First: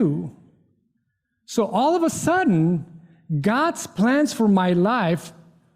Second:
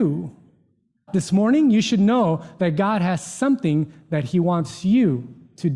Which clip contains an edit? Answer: second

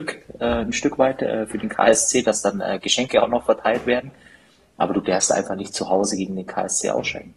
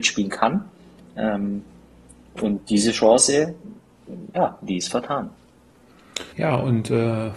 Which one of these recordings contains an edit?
second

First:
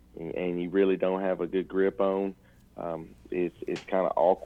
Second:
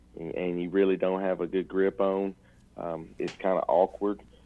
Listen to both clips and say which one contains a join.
second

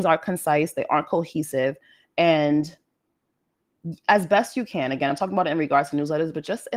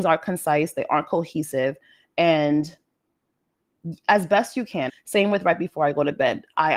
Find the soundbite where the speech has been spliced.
second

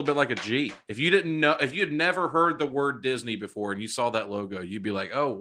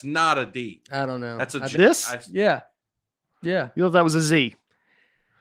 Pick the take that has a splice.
second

